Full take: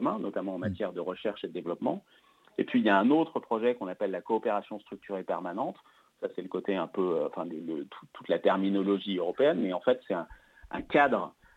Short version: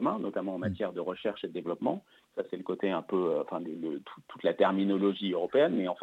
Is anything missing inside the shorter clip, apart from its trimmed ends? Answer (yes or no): yes